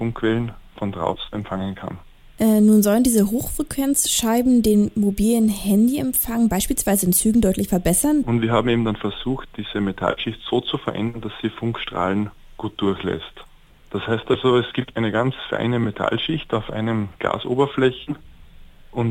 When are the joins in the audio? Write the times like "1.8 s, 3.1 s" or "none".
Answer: 8.2 s, 13.7 s, 14.9 s